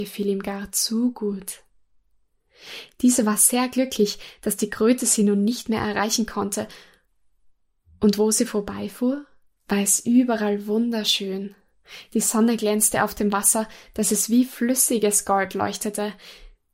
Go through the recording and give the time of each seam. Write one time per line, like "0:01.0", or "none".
none